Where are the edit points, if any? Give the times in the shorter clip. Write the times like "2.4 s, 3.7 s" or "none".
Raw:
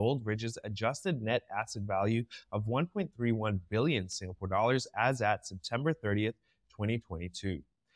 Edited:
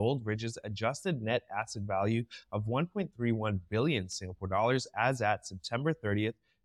none